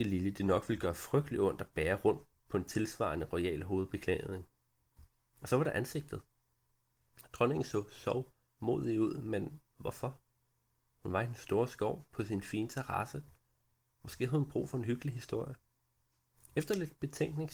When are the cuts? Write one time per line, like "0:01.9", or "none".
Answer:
0:13.9